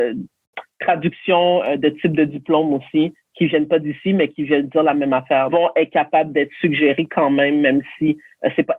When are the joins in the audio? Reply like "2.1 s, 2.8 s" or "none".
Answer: 5.5 s

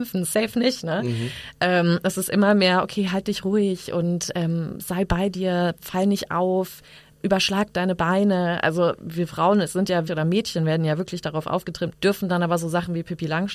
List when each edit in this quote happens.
10.1 s, 11.9 s

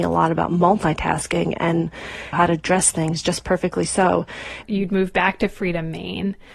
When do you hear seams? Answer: 2.3 s, 4.6 s

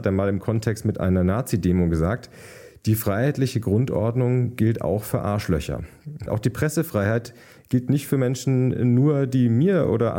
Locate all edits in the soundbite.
6.3 s

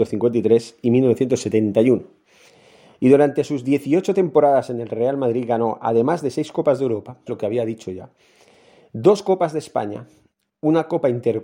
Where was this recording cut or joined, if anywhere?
7.3 s

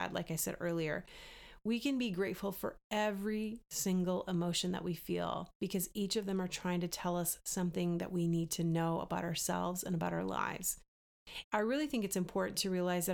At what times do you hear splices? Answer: 11.4 s

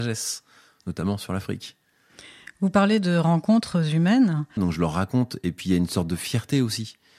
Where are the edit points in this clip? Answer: 4.6 s

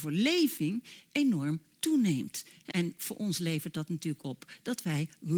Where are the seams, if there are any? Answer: 2.7 s

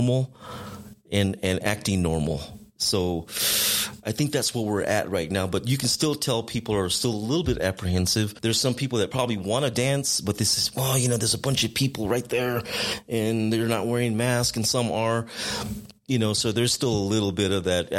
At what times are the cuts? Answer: none

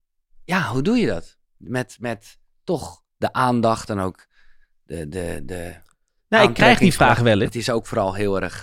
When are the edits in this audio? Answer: 7.5 s

